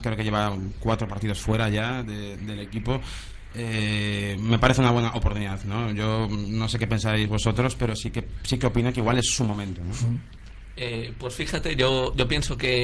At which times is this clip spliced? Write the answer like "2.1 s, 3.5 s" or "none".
none

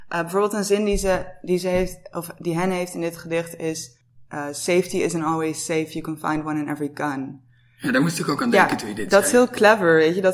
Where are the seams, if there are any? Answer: none

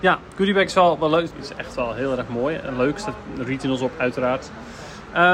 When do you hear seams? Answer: 1.3 s

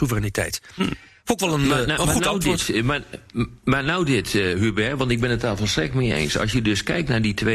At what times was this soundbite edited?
none

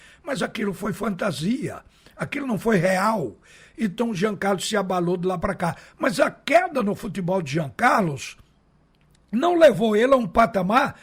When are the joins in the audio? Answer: none

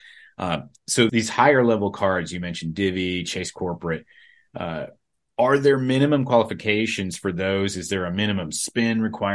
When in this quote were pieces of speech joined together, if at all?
1.1 s

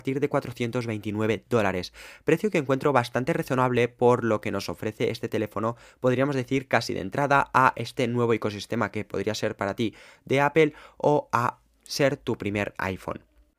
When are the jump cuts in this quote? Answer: none

